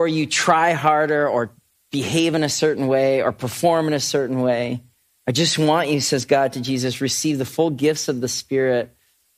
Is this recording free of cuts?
yes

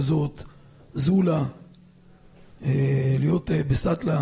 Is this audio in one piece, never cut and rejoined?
yes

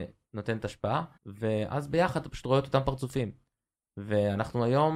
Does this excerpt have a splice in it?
yes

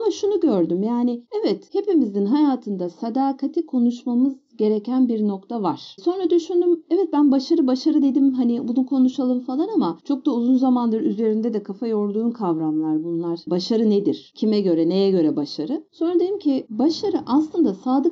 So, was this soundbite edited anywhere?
no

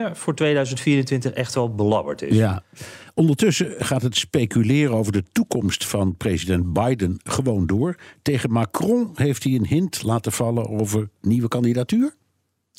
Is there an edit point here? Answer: no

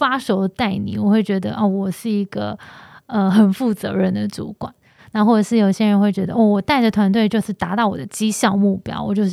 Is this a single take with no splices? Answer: yes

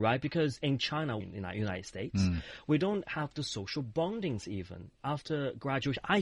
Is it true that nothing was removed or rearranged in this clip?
no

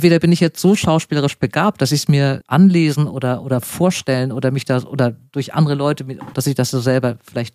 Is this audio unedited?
no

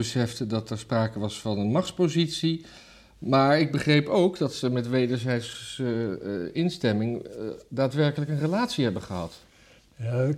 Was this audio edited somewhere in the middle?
no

